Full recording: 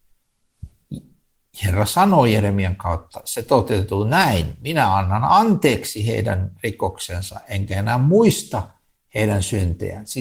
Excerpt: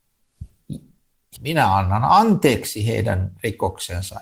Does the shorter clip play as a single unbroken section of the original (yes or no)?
no